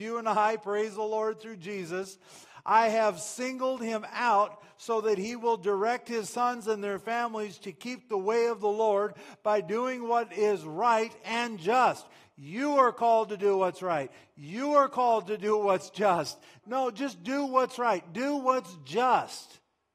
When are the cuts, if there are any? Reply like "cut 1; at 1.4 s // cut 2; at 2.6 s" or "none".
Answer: cut 1; at 16.6 s